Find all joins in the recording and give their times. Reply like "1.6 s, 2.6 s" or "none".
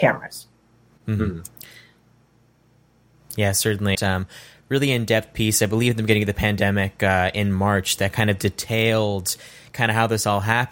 3.9 s